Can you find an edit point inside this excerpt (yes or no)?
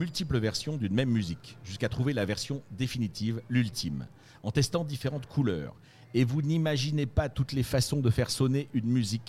no